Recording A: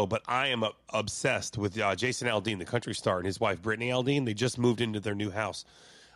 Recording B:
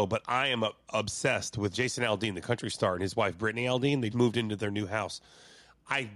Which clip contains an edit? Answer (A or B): B